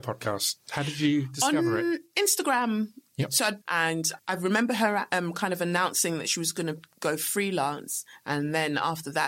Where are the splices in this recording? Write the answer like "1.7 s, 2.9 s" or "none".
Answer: 3.6 s